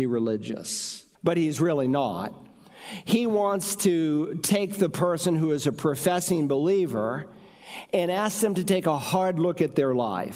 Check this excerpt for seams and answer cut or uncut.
cut